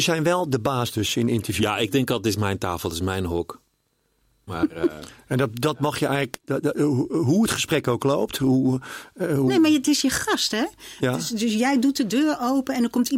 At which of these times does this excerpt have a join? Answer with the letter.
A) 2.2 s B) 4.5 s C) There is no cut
B